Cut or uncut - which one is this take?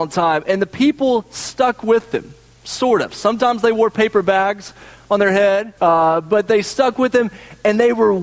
cut